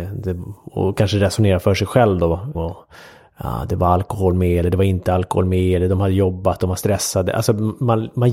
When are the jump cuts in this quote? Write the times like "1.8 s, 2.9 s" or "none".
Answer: 2.5 s